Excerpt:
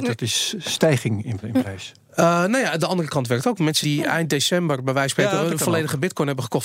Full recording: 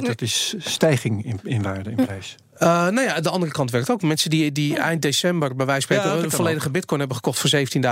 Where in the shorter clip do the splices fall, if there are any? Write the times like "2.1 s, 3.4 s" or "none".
1.4 s, 3.8 s

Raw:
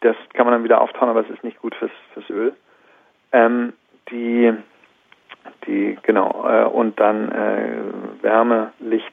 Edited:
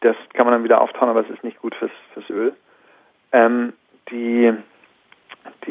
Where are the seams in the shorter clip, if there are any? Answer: none

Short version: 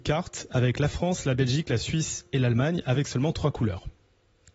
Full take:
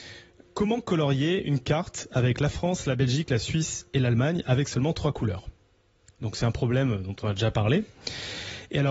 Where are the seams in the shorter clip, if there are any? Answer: none

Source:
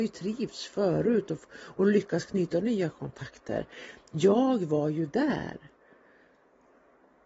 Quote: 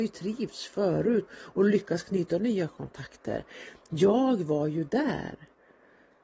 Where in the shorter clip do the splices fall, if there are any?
1.3 s

